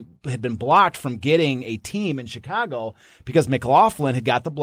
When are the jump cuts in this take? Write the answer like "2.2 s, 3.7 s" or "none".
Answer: none